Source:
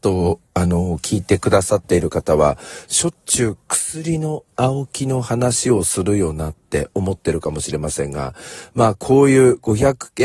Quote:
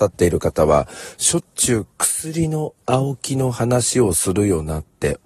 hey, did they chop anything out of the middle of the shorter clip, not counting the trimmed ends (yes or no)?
no